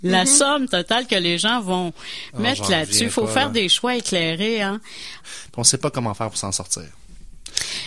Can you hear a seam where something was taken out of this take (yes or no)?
yes